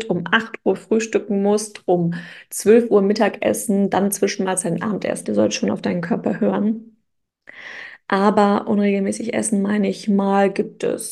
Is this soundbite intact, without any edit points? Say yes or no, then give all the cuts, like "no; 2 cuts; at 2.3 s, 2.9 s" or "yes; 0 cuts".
no; 1 cut; at 5.2 s